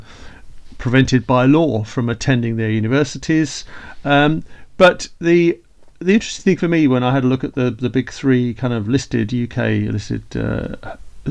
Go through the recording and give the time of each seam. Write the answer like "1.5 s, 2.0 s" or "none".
none